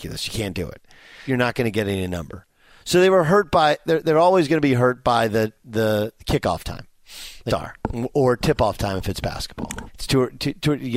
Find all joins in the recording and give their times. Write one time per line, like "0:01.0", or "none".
0:01.3
0:07.5
0:09.9